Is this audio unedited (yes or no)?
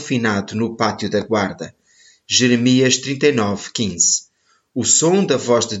yes